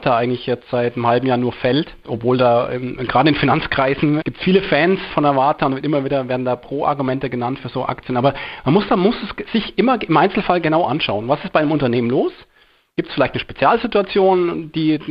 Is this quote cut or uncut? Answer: uncut